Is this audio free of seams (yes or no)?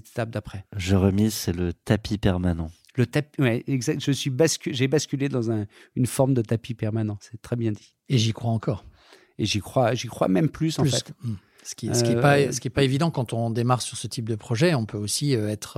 yes